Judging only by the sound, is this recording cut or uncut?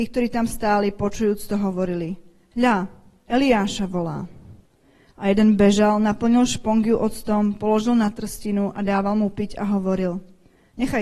uncut